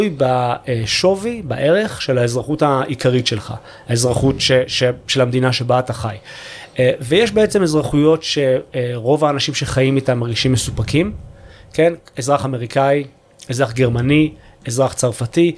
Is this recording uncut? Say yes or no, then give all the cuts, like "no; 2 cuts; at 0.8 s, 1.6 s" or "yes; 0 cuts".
yes; 0 cuts